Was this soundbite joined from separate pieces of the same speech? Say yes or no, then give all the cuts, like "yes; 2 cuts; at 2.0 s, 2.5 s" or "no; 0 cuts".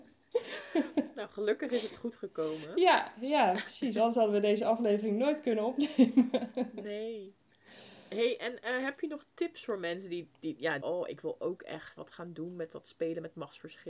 yes; 2 cuts; at 10.8 s, 12.0 s